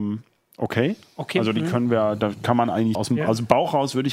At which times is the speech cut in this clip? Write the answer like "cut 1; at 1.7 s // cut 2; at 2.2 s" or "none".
cut 1; at 3.0 s